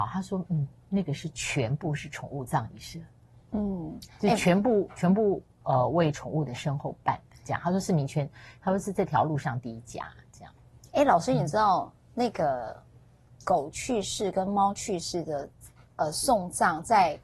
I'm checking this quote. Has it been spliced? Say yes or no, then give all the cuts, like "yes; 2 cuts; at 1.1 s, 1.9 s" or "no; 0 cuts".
yes; 1 cut; at 3.5 s